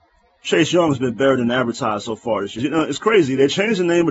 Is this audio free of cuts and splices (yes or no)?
no